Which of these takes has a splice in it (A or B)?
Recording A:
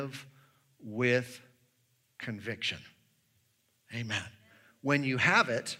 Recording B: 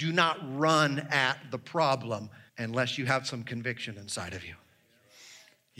B